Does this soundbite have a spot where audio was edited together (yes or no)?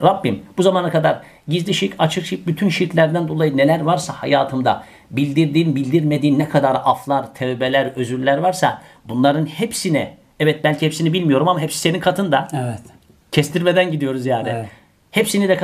no